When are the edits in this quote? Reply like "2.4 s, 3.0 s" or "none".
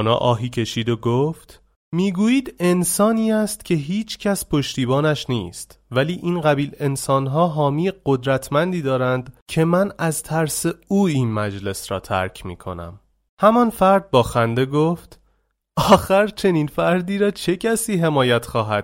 none